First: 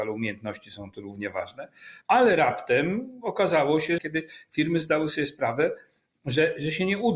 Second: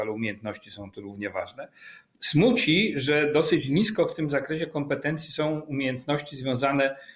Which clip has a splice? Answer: first; 2 cuts; at 2.0 s, 4.0 s

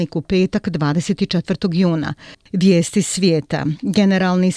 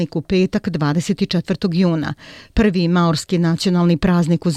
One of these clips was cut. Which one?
first; 1 cut; at 2.3 s

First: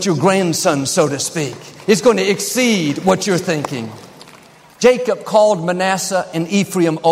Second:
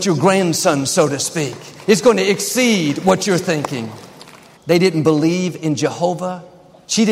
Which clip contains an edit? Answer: second; 1 cut; at 4.6 s

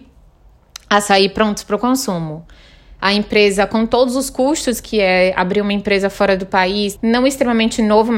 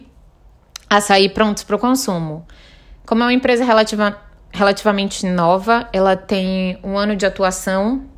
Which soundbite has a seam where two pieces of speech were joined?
first; 2 cuts; at 3.0 s, 7.0 s

